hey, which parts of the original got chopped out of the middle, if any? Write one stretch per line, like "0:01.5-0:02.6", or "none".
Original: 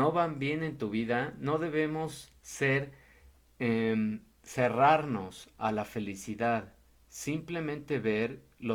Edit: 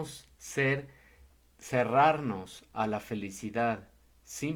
0:03.5-0:04.4